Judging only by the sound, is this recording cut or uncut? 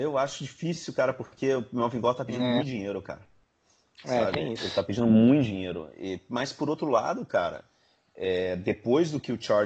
uncut